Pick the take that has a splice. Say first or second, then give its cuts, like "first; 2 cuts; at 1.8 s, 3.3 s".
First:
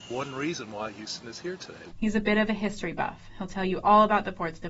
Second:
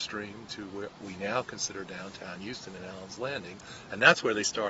first; 1 cut; at 1.9 s